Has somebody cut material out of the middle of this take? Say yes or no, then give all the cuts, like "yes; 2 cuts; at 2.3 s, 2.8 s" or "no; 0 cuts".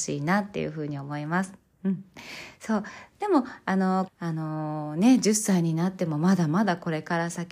yes; 1 cut; at 4.1 s